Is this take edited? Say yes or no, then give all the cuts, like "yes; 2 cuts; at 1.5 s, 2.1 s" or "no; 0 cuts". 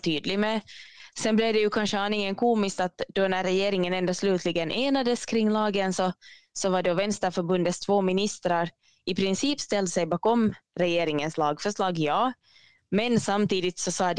no; 0 cuts